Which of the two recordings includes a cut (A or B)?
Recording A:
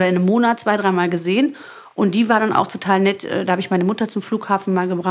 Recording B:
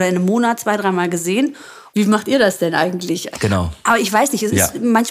B